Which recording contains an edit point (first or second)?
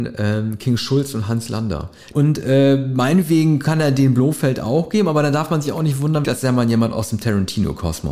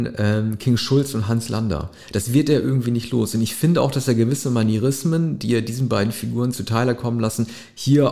first